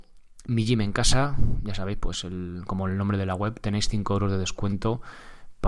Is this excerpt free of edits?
yes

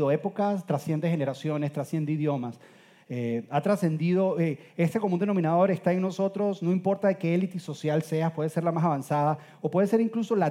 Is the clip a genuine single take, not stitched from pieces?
yes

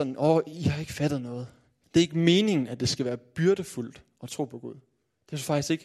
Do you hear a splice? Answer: yes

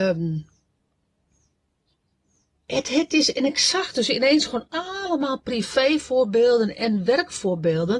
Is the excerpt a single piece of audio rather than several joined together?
yes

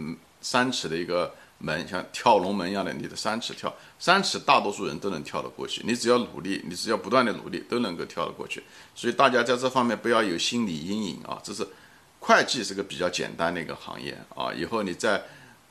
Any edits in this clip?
no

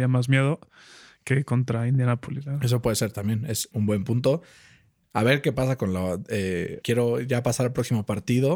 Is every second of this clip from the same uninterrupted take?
no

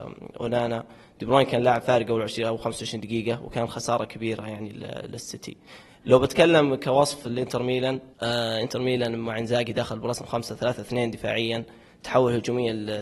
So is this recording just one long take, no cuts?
no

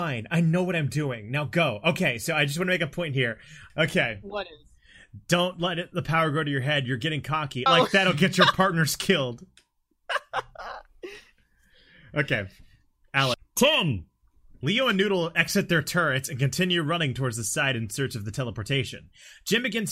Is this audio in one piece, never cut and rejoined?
no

